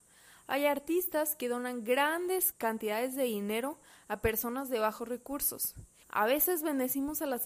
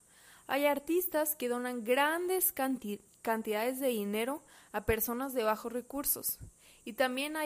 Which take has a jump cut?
first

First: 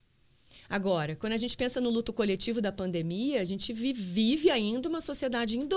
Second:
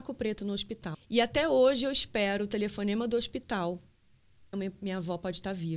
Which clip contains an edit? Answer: second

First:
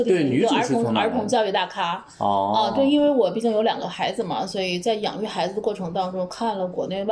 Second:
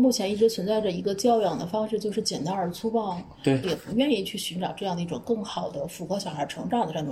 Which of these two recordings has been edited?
second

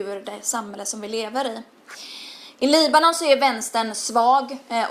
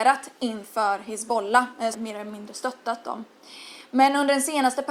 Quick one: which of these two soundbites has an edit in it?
second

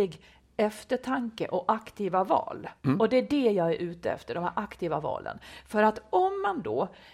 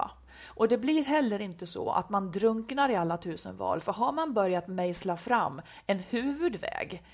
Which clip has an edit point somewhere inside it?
first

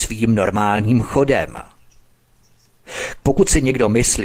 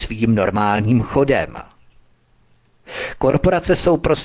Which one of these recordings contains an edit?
first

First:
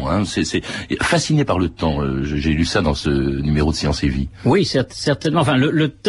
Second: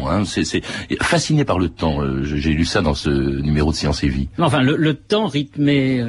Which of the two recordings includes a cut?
second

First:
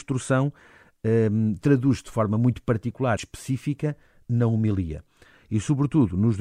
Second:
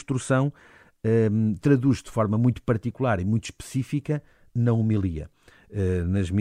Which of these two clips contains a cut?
first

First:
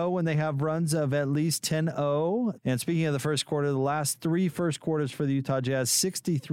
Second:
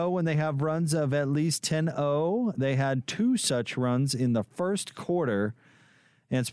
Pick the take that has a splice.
first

